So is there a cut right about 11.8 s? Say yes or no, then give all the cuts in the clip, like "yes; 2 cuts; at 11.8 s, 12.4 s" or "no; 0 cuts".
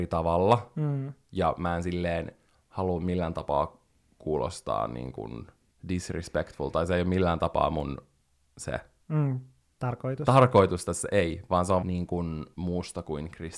yes; 1 cut; at 11.8 s